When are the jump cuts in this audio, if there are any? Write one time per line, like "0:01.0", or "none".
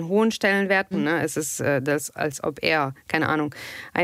0:00.9